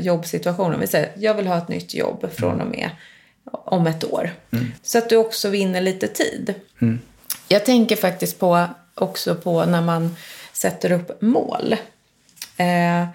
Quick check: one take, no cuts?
no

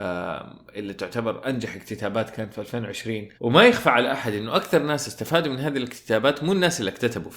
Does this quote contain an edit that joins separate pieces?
yes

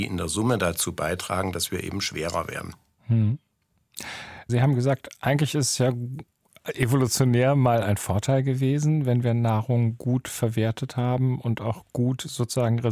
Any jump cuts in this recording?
yes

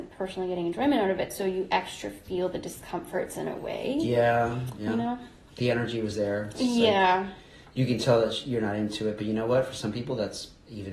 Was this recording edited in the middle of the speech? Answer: no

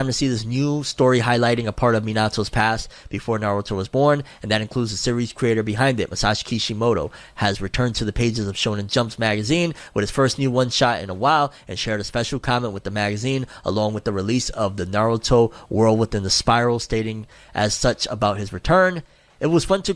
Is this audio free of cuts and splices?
yes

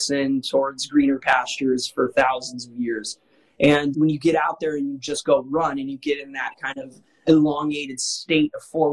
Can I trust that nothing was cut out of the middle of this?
yes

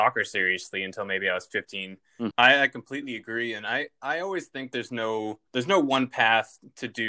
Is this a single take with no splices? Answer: no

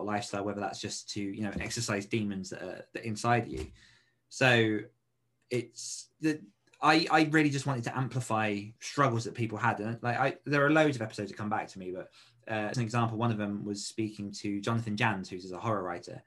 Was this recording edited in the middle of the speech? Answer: yes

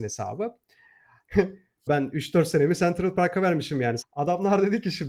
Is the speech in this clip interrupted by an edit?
yes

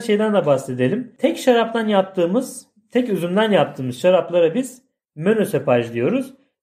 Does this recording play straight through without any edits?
yes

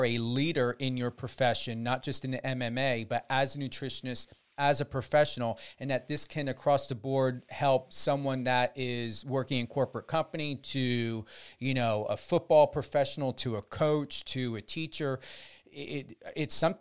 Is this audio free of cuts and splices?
yes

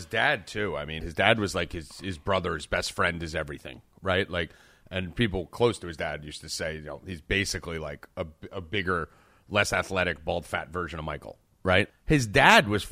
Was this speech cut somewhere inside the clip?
yes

